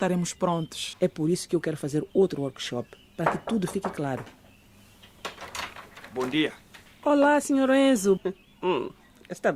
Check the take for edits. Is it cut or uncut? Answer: cut